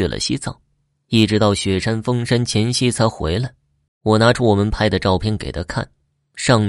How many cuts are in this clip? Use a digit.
1